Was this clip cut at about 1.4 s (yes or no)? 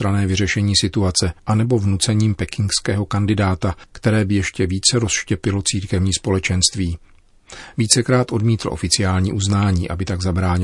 yes